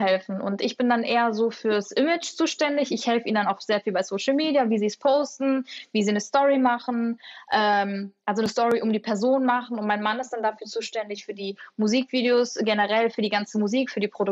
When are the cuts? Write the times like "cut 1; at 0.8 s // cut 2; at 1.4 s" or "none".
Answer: none